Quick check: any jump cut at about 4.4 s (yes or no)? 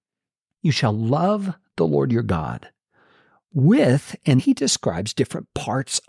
yes